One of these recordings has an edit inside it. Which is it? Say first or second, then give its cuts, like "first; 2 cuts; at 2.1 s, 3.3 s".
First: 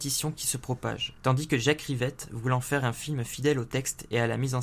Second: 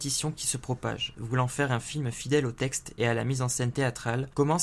second; 1 cut; at 1.2 s